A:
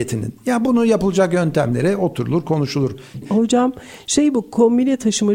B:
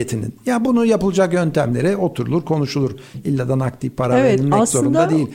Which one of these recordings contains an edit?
A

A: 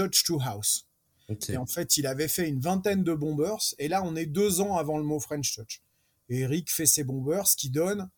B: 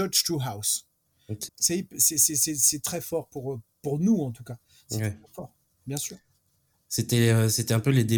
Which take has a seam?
B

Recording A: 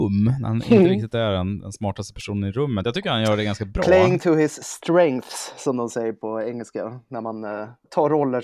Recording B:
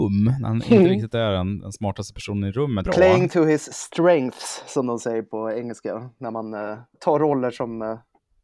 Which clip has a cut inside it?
B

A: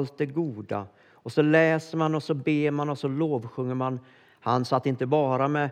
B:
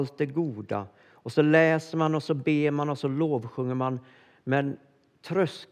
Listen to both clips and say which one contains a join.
A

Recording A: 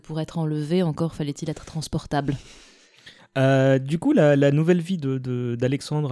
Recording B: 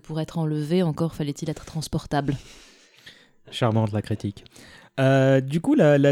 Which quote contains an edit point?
A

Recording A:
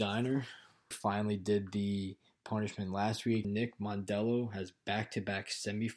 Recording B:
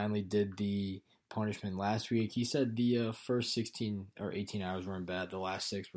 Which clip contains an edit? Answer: A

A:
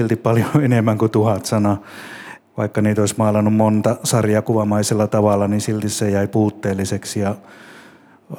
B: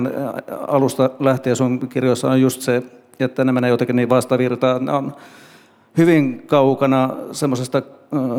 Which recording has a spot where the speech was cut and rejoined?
A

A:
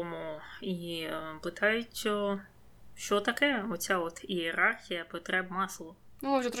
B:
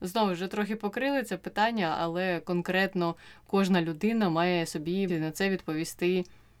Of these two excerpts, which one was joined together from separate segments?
B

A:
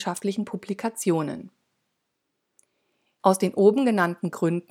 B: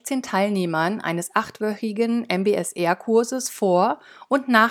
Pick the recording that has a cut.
A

